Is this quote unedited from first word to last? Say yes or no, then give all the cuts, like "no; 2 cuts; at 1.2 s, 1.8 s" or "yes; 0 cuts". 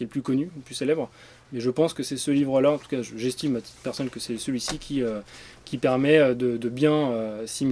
yes; 0 cuts